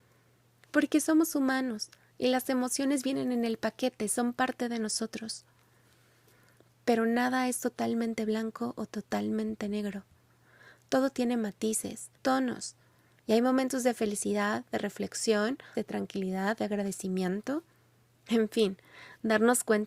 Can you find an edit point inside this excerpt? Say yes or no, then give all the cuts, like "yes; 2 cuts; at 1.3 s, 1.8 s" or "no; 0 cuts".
yes; 2 cuts; at 12.2 s, 15.7 s